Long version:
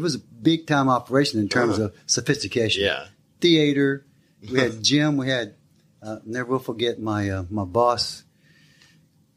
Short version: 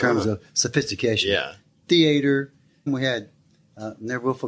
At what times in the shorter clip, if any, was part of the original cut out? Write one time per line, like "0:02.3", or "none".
0:02.9